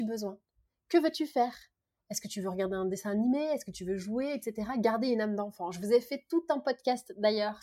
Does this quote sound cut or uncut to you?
uncut